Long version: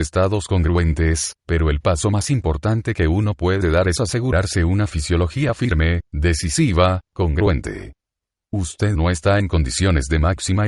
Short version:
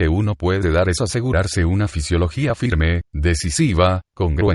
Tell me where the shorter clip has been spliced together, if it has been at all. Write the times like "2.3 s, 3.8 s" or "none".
none